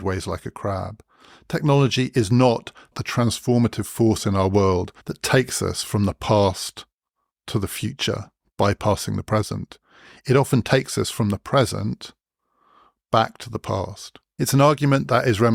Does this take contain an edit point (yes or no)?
yes